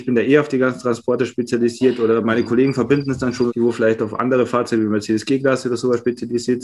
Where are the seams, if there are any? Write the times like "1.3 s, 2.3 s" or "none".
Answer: 3.5 s